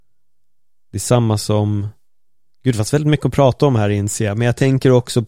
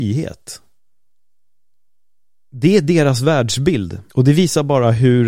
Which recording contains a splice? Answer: second; 1 cut; at 4.1 s

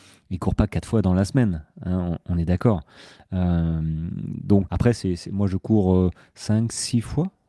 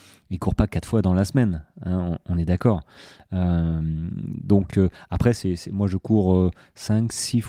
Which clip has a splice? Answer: first; 1 cut; at 4.7 s

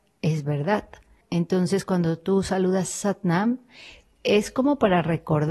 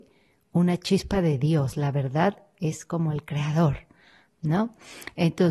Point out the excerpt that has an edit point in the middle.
first; 1 cut; at 1.2 s

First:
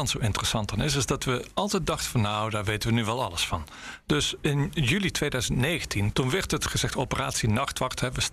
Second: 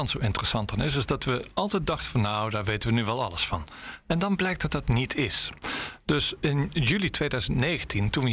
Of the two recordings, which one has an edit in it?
first; 2 cuts; at 4.0 s, 6.1 s

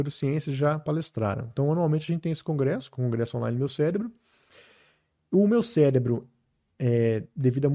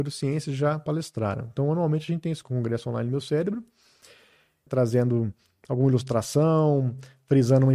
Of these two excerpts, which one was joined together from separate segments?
second; 2 cuts; at 2.4 s, 4.7 s

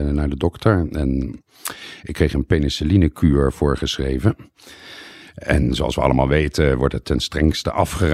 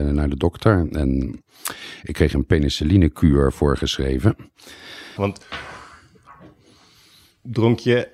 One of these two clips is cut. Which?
second; 1 cut; at 5.2 s

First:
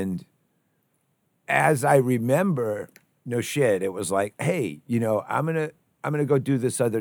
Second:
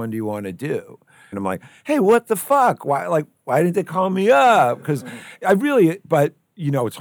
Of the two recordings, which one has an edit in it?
second; 1 cut; at 1.3 s

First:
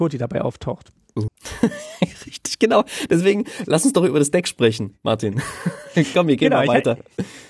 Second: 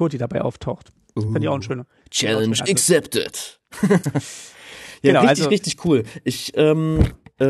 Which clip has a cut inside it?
first; 1 cut; at 1.3 s

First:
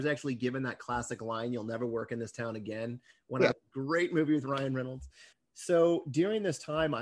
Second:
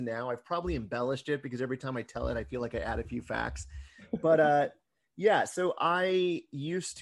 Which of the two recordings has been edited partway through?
first; 2 cuts; at 3.5 s, 5.3 s

